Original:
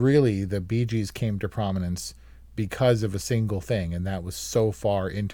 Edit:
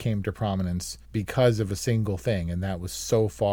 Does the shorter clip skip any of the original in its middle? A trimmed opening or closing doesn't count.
yes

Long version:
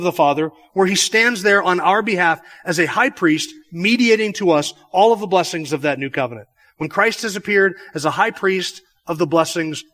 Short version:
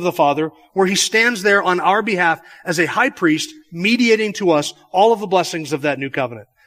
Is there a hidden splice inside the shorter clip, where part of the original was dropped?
no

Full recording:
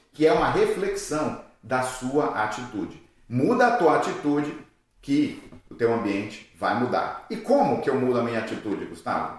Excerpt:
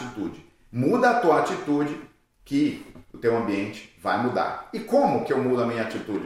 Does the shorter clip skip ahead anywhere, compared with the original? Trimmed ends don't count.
no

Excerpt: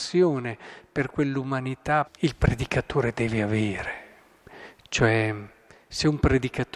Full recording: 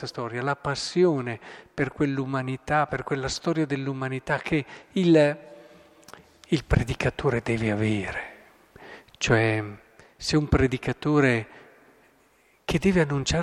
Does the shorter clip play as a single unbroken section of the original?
no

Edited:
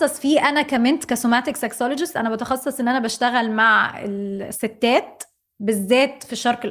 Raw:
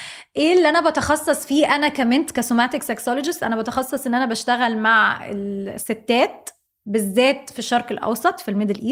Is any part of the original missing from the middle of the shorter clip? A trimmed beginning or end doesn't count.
no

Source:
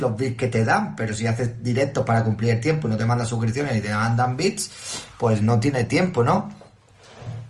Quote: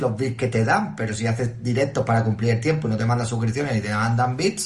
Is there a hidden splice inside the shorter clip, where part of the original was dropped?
no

